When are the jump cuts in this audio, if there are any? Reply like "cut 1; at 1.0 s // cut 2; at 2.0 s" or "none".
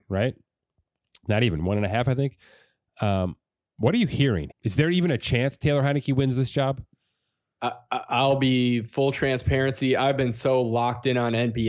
cut 1; at 4.5 s